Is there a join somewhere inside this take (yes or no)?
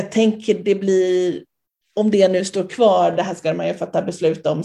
no